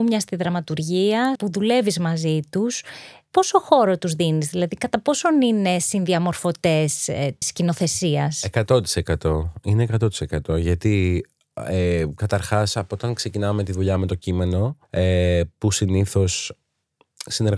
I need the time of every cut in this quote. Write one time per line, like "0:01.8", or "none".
0:01.4
0:07.4
0:14.8